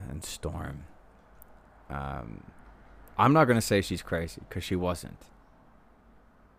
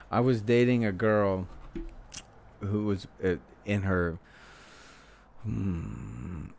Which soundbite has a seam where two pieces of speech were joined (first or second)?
second